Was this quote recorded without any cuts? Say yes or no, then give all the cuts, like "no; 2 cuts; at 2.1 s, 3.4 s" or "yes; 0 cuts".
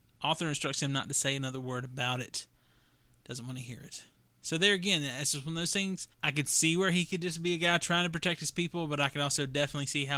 no; 1 cut; at 6.1 s